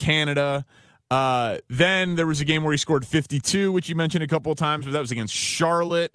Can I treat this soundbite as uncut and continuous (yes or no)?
yes